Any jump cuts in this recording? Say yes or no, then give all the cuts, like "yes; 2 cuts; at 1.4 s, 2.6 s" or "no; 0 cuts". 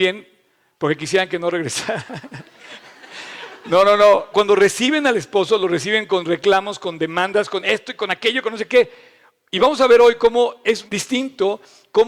yes; 2 cuts; at 4.3 s, 10.9 s